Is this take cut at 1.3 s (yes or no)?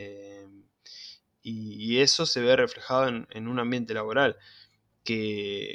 yes